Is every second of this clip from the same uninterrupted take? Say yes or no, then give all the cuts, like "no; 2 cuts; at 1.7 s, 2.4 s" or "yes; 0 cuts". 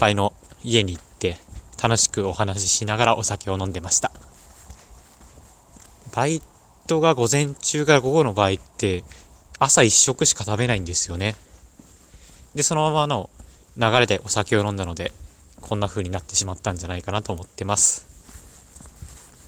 yes; 0 cuts